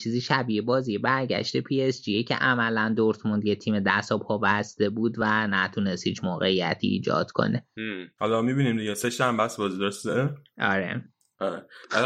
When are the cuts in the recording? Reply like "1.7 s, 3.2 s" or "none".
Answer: 8.2 s